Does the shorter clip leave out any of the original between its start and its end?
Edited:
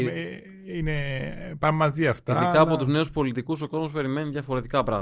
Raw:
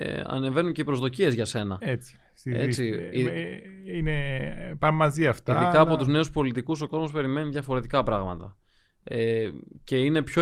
no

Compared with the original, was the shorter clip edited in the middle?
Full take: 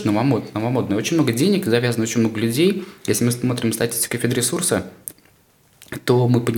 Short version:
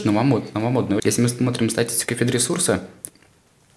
yes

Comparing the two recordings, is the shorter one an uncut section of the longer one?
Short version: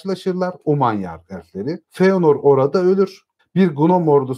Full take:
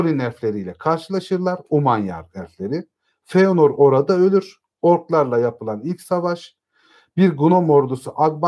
no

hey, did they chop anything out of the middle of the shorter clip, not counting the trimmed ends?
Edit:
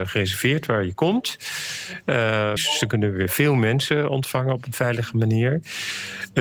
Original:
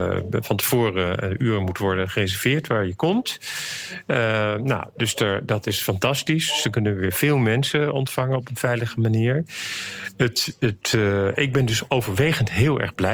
yes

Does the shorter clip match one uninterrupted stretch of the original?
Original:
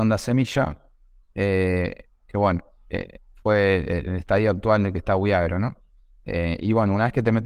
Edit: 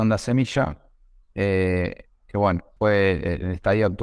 no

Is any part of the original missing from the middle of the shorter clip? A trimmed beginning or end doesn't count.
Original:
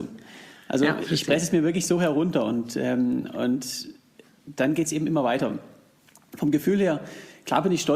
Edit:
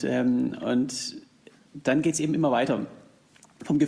no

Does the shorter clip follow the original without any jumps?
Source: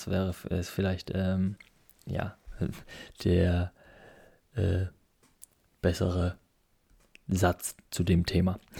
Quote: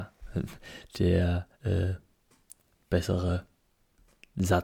no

